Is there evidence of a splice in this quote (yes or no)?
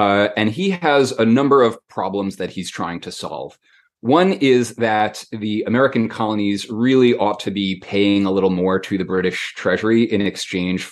no